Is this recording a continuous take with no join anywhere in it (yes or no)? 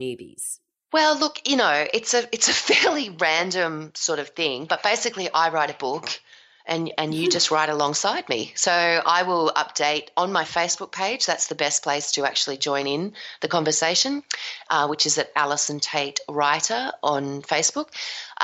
yes